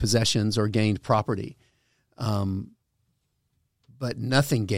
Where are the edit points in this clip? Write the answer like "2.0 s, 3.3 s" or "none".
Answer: none

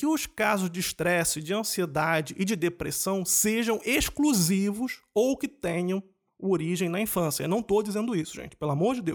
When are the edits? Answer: none

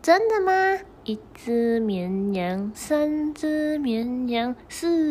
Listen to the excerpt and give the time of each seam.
1.0 s, 2.7 s

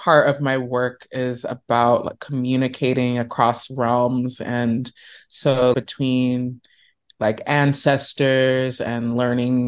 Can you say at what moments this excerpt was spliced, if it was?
5.7 s

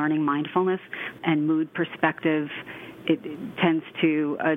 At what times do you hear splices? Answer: 1.2 s

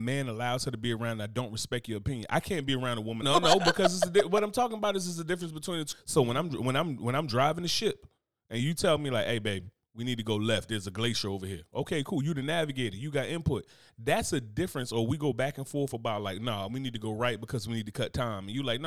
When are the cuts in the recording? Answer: 3.2 s, 5.9 s

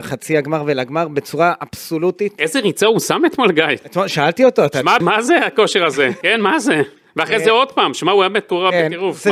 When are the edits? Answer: 5.0 s, 6.2 s

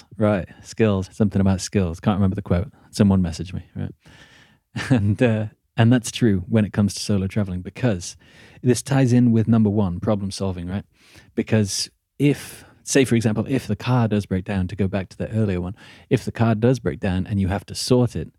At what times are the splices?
1.1 s

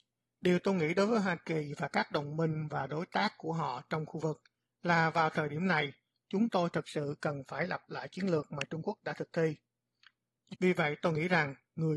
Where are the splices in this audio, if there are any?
10.5 s

